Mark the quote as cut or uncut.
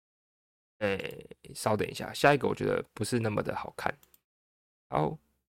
uncut